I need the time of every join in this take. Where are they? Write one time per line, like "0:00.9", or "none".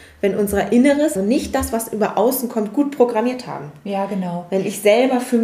0:01.2